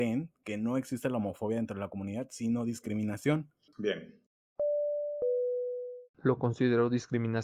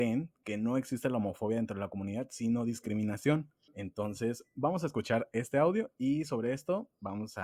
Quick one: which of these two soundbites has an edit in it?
first; 2 cuts; at 3.7 s, 6.1 s

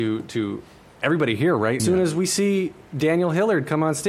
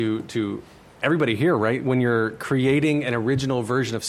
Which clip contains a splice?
first; 1 cut; at 1.8 s

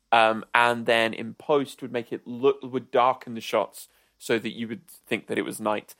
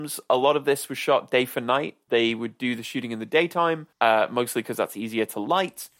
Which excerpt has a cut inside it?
second; 2 cuts; at 2.1 s, 3.9 s

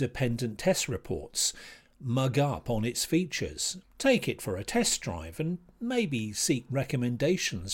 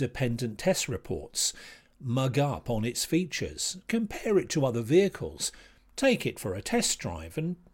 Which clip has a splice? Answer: first; 1 cut; at 3.8 s

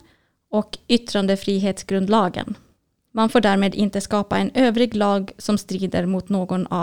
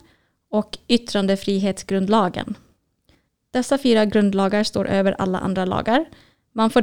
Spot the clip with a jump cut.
first; 1 cut; at 3.1 s

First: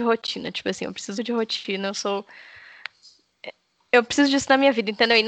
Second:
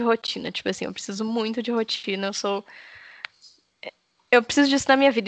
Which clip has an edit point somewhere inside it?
first; 1 cut; at 1.2 s

